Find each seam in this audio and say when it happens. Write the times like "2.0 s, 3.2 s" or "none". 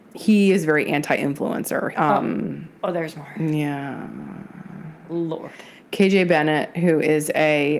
1.9 s